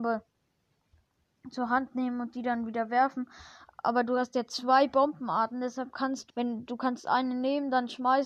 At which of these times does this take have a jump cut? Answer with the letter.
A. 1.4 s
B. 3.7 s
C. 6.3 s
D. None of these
C